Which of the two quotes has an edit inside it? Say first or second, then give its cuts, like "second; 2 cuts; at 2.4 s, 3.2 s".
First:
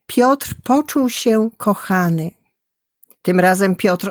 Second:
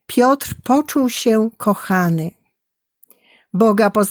first; 1 cut; at 3.1 s